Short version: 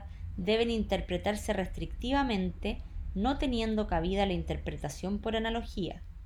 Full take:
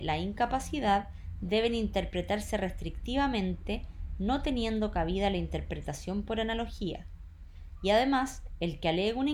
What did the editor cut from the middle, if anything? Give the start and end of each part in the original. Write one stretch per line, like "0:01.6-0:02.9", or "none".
none